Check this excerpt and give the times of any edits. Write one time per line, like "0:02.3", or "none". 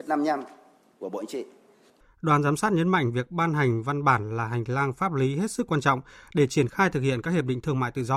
0:02.0